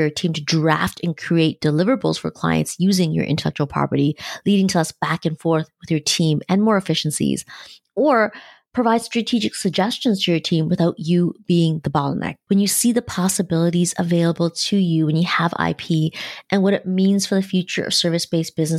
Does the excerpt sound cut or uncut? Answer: cut